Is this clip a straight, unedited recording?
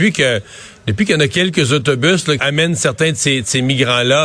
no; 1 cut; at 2.4 s

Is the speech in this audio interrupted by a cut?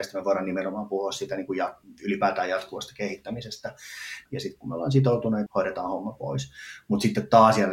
yes; 2 cuts; at 4.3 s, 5.5 s

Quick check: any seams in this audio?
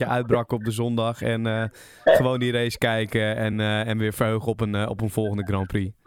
no; 0 cuts

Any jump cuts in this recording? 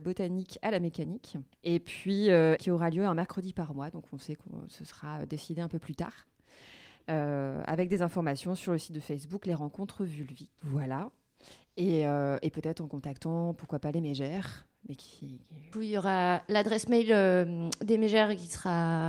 yes; 3 cuts; at 1.5 s, 2.6 s, 15.7 s

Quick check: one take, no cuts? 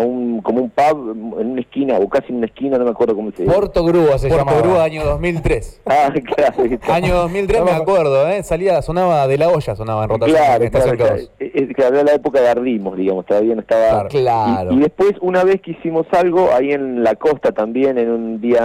yes; 0 cuts

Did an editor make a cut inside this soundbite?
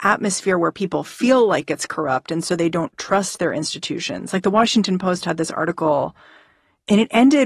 no; 0 cuts

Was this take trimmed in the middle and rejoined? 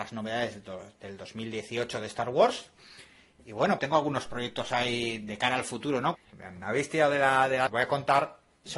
yes; 3 cuts; at 3.8 s, 6.1 s, 7.7 s

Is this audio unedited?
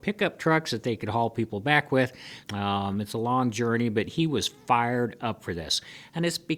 no; 1 cut; at 2.4 s

